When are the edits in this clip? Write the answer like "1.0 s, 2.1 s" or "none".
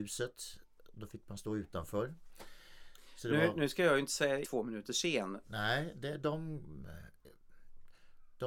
4.4 s, 5.4 s